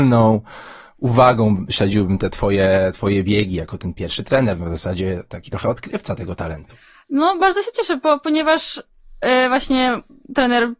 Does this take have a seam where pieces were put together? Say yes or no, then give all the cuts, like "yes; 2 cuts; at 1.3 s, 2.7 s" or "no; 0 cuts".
no; 0 cuts